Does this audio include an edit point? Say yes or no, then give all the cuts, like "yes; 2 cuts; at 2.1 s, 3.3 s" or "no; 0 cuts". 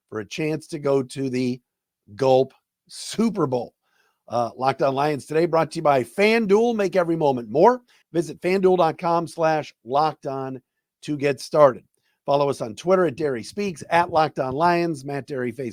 yes; 1 cut; at 8.0 s